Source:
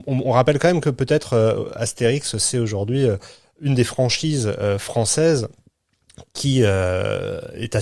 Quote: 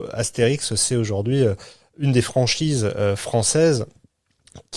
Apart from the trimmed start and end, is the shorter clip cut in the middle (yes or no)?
no